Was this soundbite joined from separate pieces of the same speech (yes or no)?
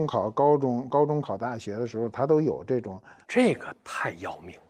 yes